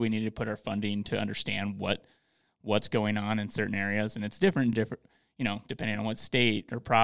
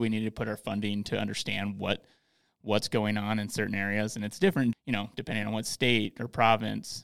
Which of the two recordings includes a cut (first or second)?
second